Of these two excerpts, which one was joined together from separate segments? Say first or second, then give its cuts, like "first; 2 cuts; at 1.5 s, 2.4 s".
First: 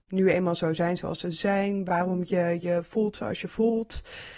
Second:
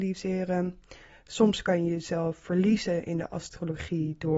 first; 1 cut; at 1.9 s